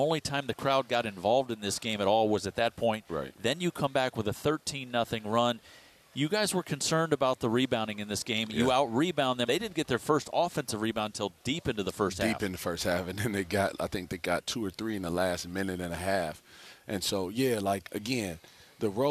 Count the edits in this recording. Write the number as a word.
two